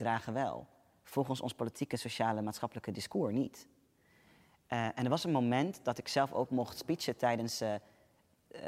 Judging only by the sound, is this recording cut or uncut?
uncut